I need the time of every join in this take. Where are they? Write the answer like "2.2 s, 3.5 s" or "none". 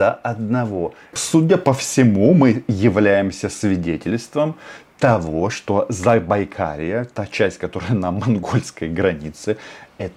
1.1 s